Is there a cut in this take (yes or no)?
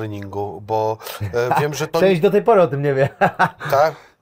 no